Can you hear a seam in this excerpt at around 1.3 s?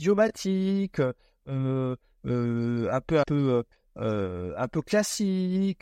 no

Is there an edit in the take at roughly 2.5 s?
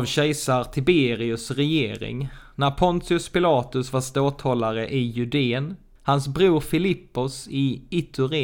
no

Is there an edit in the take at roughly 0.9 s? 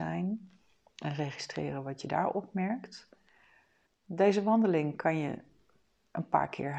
no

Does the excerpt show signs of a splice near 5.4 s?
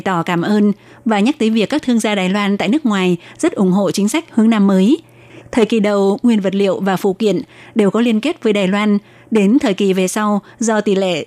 yes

